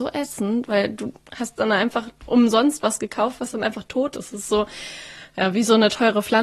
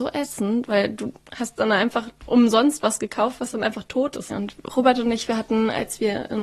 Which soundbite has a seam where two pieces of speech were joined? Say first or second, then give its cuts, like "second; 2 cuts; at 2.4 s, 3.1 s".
second; 1 cut; at 4.3 s